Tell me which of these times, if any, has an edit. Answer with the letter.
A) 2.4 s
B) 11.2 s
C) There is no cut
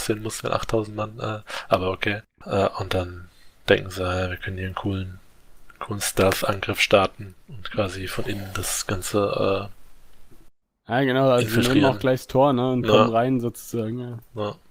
A